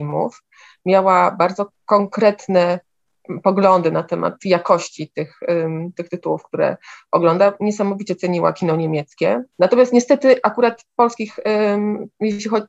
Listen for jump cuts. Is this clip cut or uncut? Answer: cut